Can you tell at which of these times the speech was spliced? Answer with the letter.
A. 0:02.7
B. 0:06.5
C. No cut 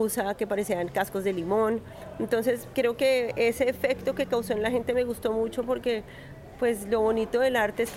A